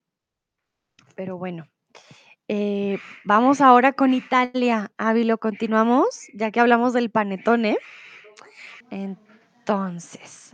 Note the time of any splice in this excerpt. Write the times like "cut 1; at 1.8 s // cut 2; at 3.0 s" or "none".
cut 1; at 8.8 s